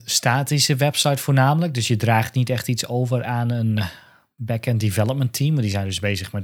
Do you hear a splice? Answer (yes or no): no